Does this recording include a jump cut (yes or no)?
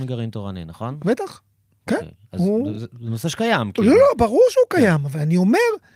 no